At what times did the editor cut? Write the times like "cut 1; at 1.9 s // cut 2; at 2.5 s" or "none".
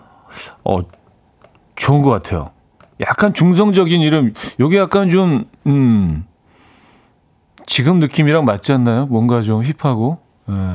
cut 1; at 5.5 s